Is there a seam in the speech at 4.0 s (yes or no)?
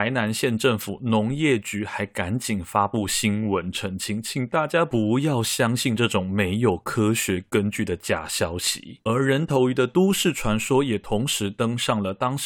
no